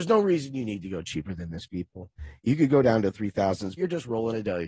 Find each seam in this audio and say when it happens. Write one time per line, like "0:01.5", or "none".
0:03.8